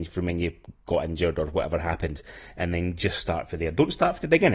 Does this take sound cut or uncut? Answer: uncut